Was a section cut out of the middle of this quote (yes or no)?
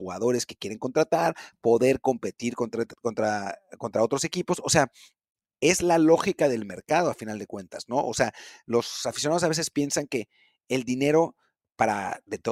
no